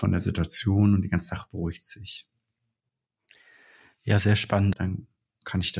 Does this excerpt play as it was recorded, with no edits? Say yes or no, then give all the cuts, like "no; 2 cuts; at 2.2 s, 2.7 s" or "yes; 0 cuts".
no; 1 cut; at 4.7 s